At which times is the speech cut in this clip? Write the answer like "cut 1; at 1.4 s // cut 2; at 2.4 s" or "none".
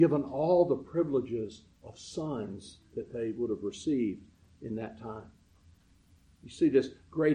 none